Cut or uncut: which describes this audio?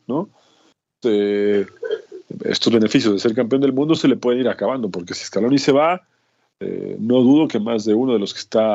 cut